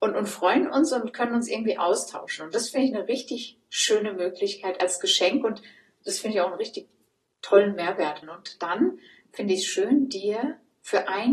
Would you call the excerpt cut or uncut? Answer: cut